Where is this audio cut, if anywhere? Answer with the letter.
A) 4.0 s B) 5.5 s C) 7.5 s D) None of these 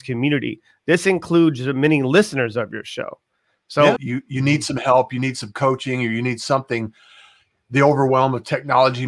A